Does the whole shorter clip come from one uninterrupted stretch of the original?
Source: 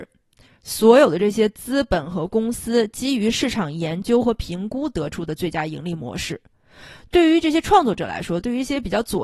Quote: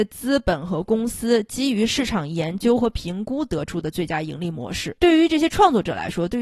no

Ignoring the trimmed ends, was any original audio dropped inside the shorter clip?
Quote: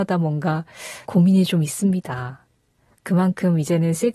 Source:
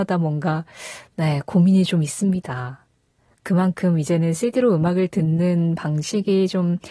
yes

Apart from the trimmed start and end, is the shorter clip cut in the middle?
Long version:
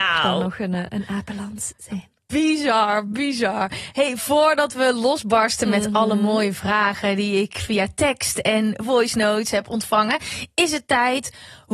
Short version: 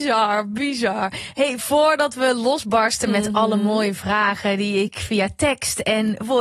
no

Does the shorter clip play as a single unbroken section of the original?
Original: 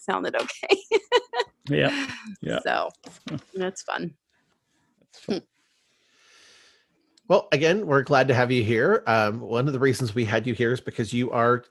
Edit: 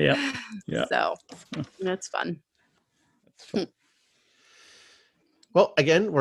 yes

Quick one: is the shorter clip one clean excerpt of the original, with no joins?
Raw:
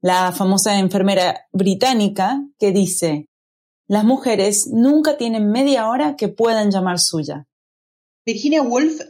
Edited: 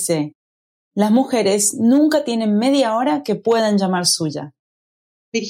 yes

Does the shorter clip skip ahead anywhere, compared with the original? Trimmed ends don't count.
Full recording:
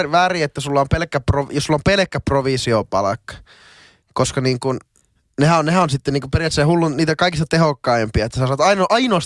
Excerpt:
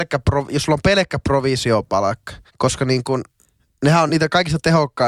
yes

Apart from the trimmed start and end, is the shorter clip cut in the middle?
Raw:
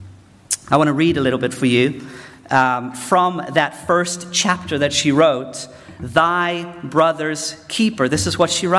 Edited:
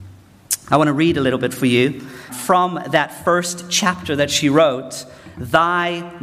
yes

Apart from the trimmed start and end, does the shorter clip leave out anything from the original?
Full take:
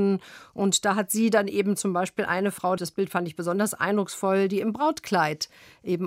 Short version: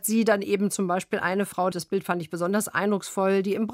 no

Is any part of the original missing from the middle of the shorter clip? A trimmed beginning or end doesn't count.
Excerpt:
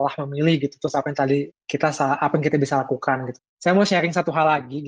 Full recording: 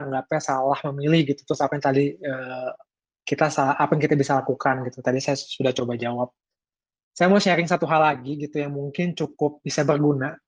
yes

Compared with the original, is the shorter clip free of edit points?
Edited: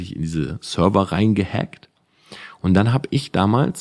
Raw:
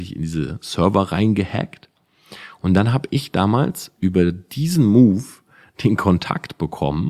yes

